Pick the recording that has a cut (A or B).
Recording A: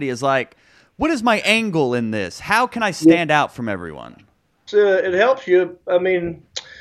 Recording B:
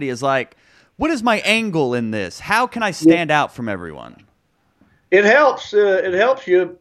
A